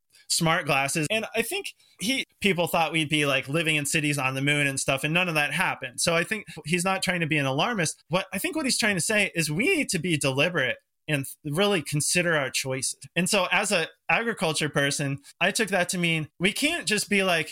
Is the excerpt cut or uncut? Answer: cut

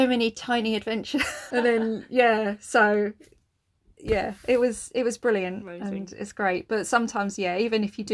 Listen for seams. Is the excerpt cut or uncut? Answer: cut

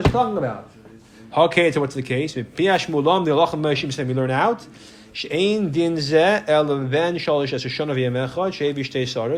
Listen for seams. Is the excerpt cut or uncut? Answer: uncut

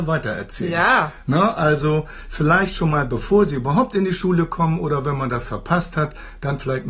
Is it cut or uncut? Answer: uncut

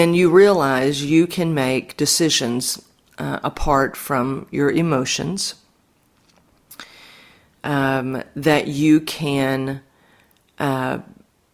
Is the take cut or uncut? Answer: uncut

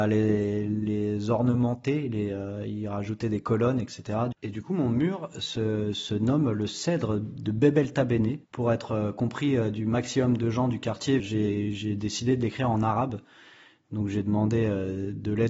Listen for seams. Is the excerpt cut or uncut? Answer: cut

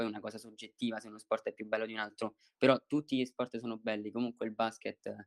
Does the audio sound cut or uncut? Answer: uncut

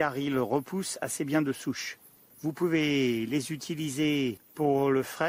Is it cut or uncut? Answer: cut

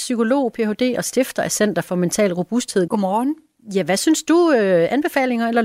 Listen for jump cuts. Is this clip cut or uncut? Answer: cut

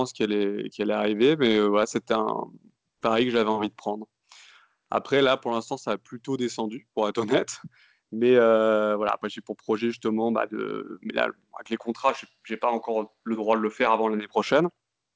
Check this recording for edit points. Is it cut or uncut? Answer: uncut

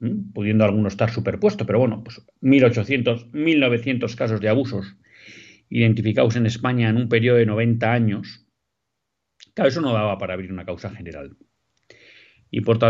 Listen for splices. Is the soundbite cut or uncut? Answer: uncut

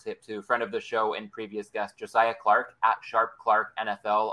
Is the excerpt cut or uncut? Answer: uncut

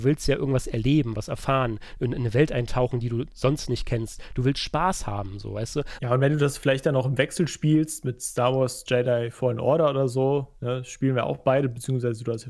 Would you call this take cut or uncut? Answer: cut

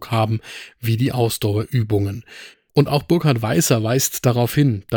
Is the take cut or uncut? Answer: cut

